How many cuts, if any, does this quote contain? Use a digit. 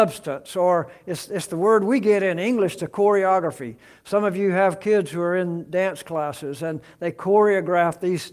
0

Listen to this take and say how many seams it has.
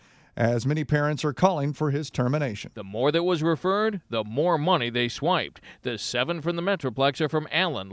1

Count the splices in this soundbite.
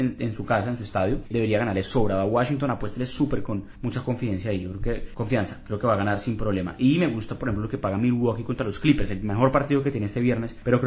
0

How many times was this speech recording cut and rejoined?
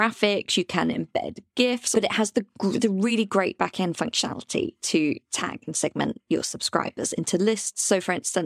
1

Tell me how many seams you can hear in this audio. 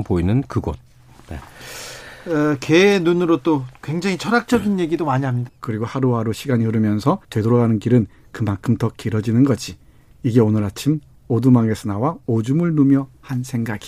2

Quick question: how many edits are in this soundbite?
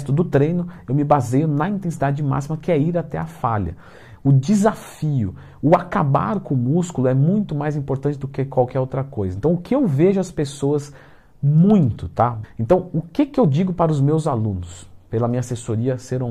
1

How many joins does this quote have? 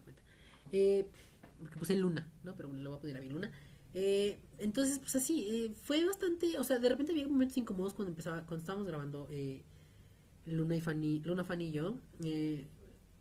0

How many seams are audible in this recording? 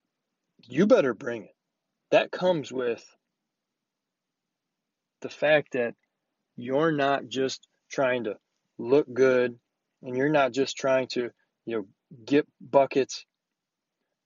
1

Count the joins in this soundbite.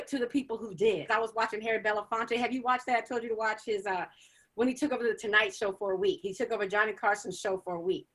1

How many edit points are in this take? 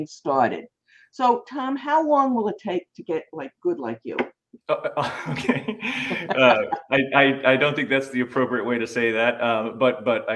1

